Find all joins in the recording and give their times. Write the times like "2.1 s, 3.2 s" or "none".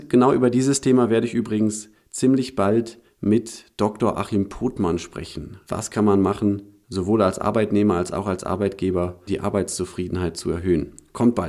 5.6 s, 9.3 s